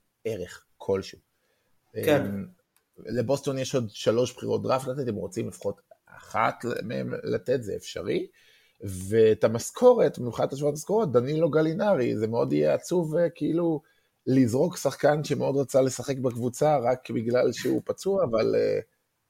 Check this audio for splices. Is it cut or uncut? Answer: uncut